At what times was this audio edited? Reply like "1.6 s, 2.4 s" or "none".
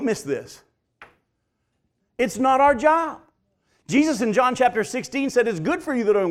2.0 s